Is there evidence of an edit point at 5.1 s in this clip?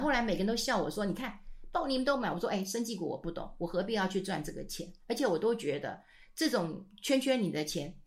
no; 0 cuts

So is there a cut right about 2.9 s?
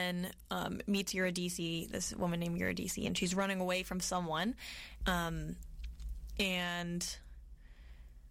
no; 1 cut; at 5.0 s

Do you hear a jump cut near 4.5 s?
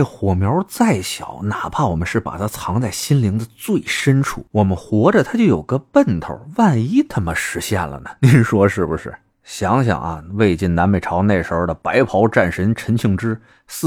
yes; 2 cuts; at 4.5 s, 9.4 s

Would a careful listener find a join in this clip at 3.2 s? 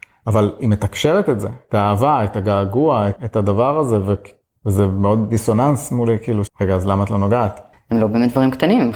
yes; 3 cuts; at 3.2 s, 6.5 s, 7.7 s

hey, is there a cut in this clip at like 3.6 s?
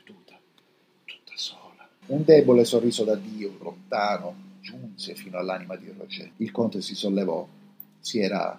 yes; 3 cuts; at 2.0 s, 3.6 s, 6.3 s

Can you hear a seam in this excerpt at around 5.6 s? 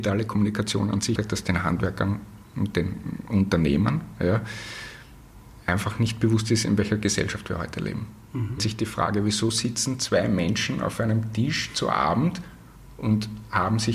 no; 2 cuts; at 1.2 s, 8.6 s

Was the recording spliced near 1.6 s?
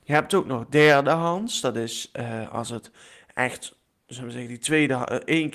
no; 0 cuts

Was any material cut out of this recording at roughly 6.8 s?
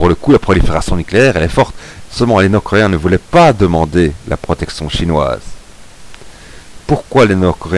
no; 1 cut; at 2.1 s

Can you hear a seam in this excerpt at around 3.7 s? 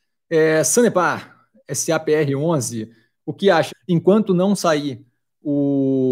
yes; 1 cut; at 3.7 s

